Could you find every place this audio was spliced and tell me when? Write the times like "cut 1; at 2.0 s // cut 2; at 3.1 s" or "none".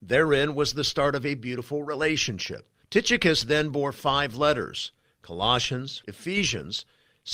cut 1; at 2.8 s // cut 2; at 6.0 s